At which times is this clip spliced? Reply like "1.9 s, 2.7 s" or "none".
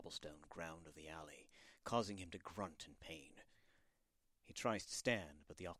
none